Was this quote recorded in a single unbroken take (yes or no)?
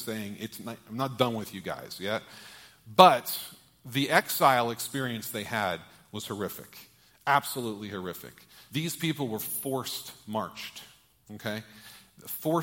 no